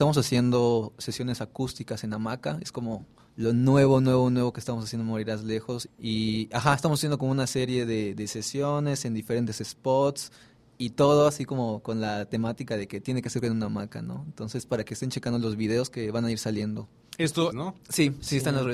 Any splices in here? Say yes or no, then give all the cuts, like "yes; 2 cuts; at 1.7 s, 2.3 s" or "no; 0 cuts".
yes; 2 cuts; at 5.9 s, 17.5 s